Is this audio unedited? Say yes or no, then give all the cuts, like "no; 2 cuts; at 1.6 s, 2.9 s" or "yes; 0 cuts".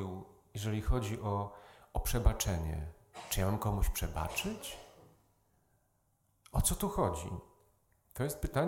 yes; 0 cuts